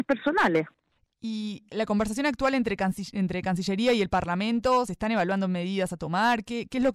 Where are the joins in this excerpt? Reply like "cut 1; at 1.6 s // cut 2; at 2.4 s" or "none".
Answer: none